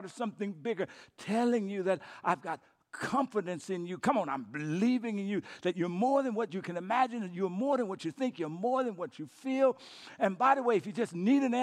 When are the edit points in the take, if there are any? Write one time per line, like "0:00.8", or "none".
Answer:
none